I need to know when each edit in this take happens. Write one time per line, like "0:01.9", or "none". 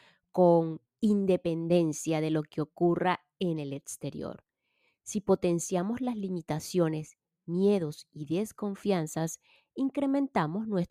none